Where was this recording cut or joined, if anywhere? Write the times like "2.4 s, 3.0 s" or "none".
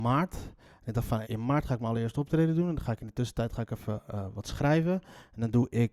1.2 s